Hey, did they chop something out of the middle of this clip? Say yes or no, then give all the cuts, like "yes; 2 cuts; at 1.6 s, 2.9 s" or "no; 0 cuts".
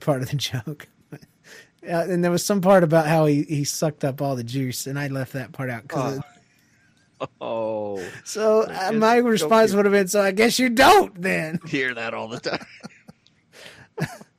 yes; 1 cut; at 6.2 s